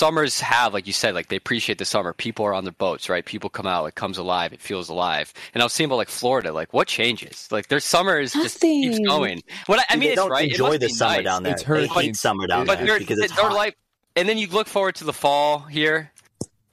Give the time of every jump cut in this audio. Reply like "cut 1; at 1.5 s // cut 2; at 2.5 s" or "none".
cut 1; at 10.1 s